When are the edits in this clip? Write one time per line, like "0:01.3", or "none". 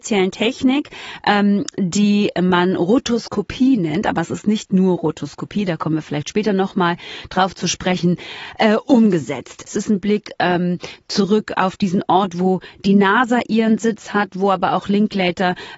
none

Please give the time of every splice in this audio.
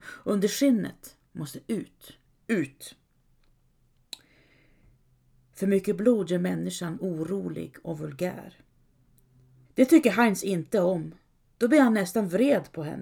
0:02.3
0:09.7

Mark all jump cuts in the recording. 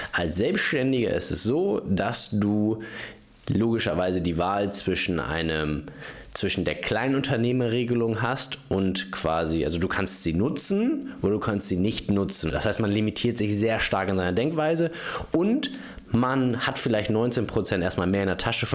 0:12.5

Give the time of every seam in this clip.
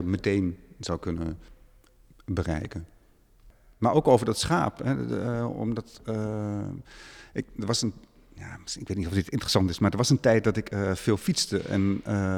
none

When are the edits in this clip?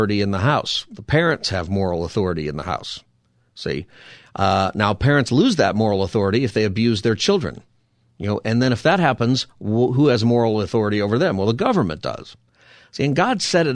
none

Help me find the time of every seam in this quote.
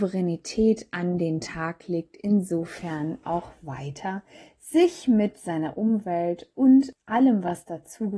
0:03.2

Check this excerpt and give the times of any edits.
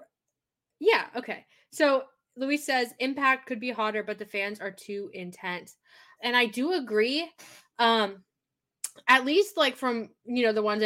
0:06.2

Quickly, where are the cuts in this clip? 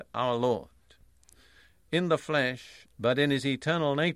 0:02.9

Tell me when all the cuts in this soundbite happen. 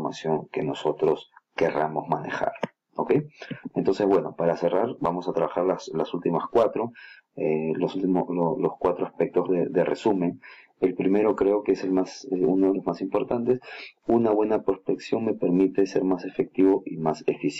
0:05.0

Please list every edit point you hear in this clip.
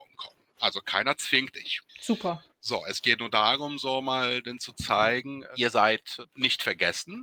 0:01.9

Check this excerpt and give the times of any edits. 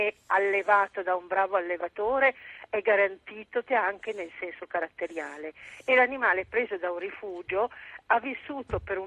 0:03.7

